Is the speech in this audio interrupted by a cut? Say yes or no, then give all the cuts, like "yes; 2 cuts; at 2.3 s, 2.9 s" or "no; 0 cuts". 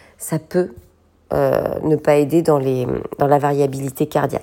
no; 0 cuts